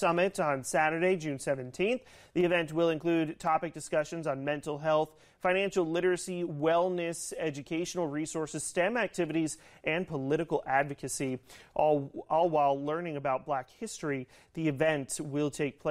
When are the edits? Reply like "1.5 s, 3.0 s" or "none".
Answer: none